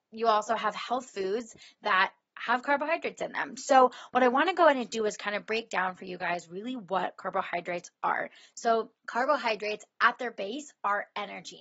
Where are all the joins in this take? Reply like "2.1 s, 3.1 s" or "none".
9.0 s

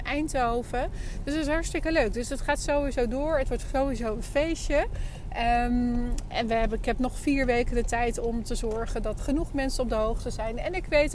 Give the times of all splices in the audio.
6.3 s, 9.2 s

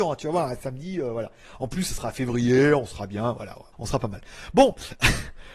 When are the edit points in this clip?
3.7 s

